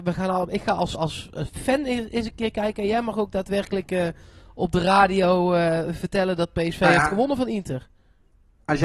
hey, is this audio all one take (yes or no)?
yes